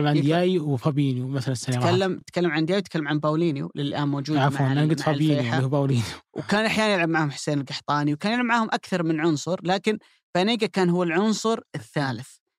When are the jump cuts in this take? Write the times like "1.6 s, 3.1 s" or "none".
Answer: none